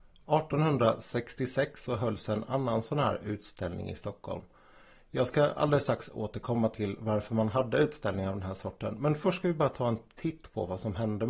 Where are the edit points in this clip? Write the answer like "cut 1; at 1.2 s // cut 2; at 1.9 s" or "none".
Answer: none